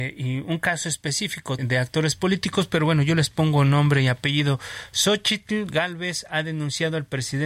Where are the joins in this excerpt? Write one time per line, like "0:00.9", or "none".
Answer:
0:01.6